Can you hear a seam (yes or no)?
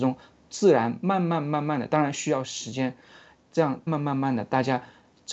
yes